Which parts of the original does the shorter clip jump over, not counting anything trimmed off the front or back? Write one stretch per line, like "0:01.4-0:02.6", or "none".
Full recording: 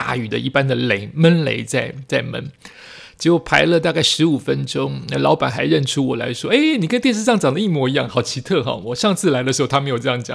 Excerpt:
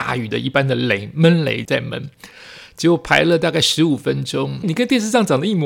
0:01.7-0:02.1
0:05.1-0:06.8

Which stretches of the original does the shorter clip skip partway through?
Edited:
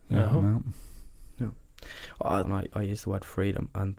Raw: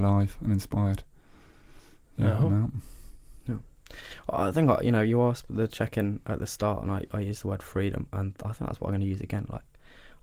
0:04.5-0:06.8

